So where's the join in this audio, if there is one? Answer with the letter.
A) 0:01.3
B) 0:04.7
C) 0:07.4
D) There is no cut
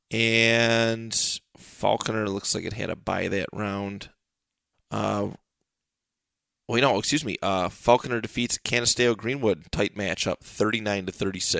B